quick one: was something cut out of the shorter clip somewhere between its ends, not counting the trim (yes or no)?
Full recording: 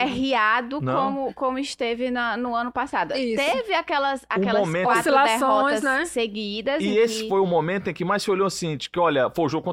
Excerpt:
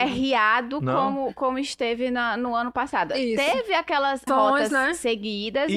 yes